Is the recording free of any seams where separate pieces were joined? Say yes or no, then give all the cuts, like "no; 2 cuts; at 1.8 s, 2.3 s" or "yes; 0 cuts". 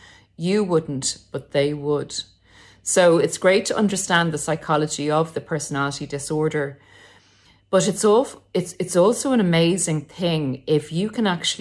yes; 0 cuts